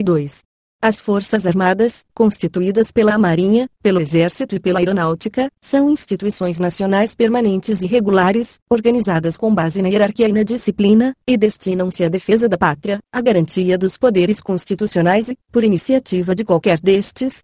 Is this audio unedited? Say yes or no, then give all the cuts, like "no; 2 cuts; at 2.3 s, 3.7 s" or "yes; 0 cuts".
no; 1 cut; at 11.2 s